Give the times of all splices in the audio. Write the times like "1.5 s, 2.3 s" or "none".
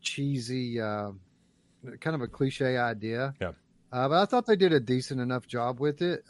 none